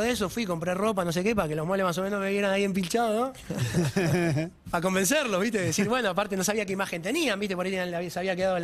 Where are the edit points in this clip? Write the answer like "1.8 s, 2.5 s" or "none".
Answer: none